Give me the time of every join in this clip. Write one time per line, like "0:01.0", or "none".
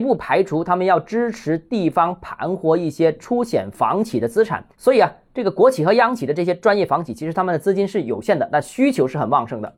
none